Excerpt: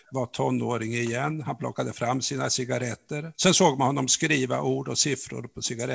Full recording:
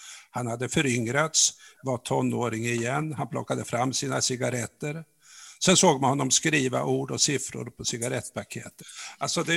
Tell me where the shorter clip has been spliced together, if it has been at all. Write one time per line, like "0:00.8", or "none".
0:03.3